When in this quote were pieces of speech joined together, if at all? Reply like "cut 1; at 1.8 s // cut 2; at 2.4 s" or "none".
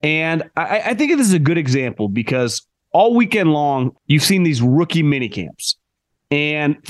cut 1; at 3.9 s